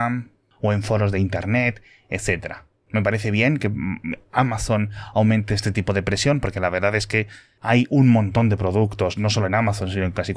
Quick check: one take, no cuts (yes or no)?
yes